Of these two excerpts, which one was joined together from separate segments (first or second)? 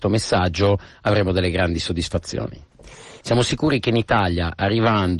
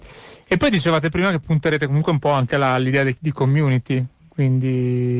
first